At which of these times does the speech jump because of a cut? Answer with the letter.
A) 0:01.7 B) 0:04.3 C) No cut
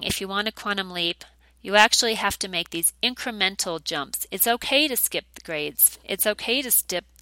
C